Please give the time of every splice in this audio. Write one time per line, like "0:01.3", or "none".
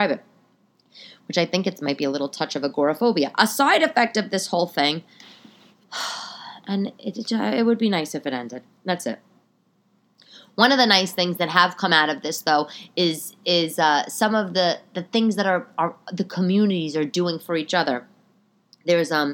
none